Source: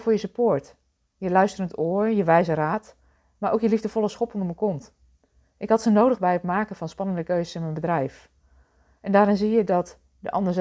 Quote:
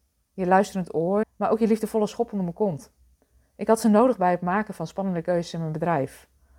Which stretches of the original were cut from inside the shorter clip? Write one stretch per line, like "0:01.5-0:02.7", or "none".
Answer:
0:02.1-0:03.2